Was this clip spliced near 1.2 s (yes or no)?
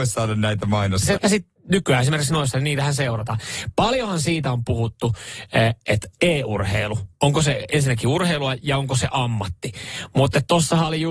yes